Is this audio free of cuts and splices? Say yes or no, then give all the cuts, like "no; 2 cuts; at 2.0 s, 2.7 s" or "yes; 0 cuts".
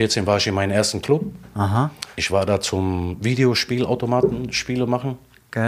yes; 0 cuts